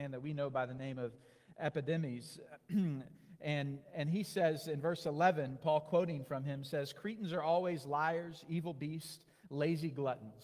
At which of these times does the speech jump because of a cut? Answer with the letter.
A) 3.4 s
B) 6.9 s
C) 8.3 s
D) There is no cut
D